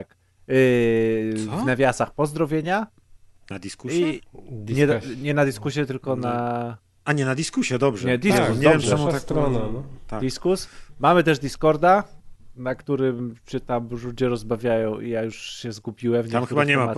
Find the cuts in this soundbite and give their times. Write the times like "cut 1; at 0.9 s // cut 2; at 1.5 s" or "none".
none